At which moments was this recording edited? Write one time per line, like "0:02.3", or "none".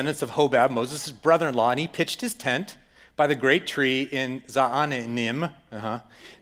none